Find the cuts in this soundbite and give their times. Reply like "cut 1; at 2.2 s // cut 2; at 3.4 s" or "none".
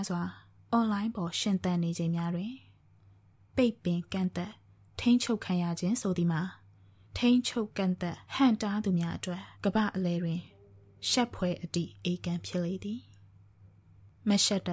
cut 1; at 8.3 s // cut 2; at 9.5 s